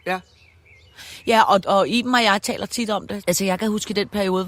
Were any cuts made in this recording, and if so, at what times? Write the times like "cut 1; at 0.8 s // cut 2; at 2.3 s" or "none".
cut 1; at 1.6 s // cut 2; at 3.2 s